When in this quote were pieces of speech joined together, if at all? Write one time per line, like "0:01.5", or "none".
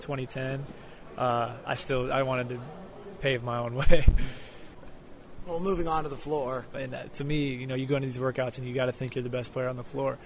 0:06.7